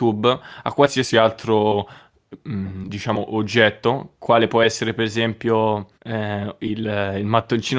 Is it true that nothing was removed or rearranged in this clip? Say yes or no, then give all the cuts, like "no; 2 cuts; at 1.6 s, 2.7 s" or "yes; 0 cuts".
no; 1 cut; at 5.9 s